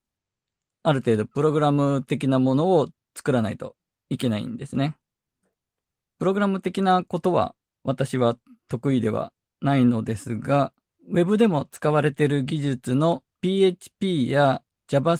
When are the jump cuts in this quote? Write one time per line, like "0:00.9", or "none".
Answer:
0:10.9
0:13.3

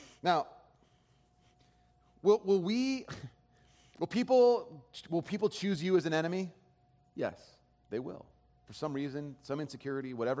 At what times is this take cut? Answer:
0:07.8

